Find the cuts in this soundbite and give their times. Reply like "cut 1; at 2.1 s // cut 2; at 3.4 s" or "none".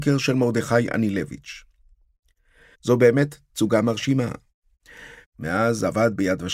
cut 1; at 2.7 s // cut 2; at 5.2 s